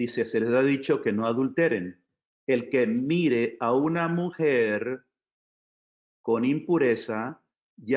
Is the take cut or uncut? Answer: cut